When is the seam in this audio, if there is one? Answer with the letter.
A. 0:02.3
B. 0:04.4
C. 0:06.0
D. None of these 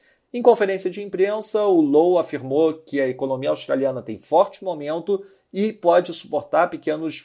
D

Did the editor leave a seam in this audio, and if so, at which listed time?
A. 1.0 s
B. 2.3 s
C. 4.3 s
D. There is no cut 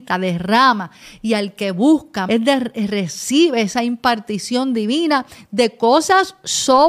B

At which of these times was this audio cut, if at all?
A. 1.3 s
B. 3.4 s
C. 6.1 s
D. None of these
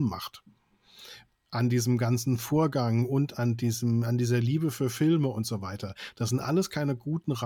A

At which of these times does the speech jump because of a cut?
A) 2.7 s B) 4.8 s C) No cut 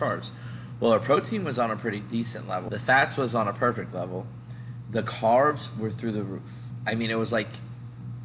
A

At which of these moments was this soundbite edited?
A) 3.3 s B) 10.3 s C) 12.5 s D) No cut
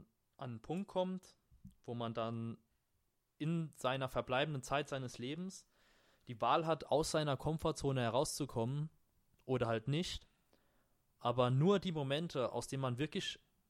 D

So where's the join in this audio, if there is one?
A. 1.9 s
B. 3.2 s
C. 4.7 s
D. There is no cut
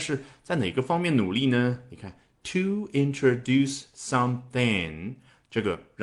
D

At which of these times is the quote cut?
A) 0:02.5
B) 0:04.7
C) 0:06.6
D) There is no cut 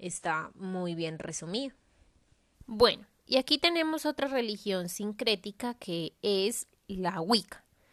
A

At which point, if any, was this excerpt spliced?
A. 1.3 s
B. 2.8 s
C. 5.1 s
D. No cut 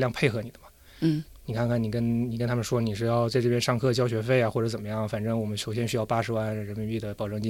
A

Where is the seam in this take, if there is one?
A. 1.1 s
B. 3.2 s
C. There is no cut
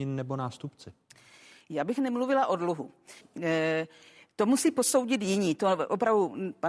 B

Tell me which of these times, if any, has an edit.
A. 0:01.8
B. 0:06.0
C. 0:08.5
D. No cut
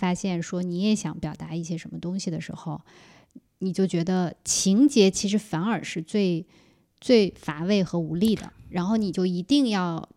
C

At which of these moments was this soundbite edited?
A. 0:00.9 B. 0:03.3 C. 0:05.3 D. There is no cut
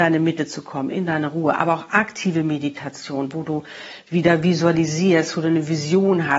A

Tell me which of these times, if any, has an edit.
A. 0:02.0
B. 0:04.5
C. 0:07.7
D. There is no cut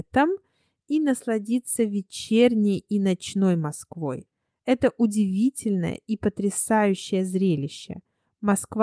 D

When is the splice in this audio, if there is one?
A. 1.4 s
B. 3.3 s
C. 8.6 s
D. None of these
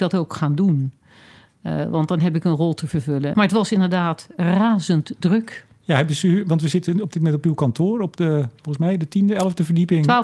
B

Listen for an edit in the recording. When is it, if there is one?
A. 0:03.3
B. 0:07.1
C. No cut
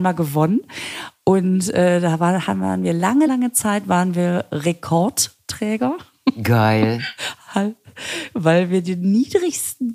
A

